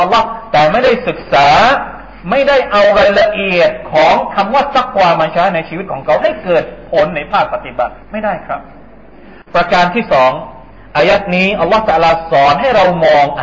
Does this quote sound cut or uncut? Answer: cut